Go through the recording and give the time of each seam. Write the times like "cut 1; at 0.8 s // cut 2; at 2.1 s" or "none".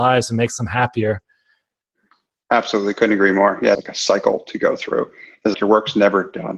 cut 1; at 3.7 s // cut 2; at 5.5 s